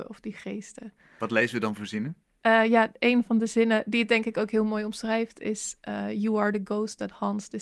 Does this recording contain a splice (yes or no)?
no